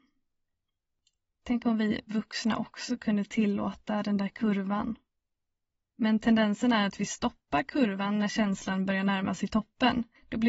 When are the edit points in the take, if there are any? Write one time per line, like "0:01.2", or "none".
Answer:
0:05.9